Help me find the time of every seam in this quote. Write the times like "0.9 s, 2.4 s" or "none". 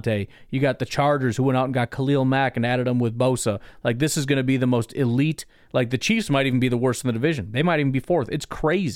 none